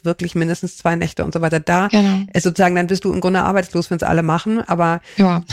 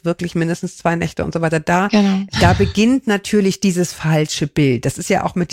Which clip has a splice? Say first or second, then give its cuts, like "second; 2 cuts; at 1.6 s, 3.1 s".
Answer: second; 1 cut; at 2.3 s